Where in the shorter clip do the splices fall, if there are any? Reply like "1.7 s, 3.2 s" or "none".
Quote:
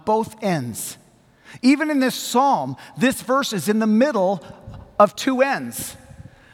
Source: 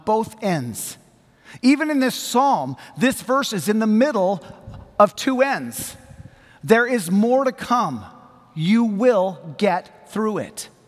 none